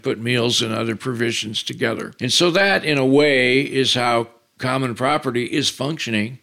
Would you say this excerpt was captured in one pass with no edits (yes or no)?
yes